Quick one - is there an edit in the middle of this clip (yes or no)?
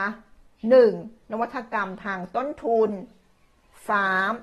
yes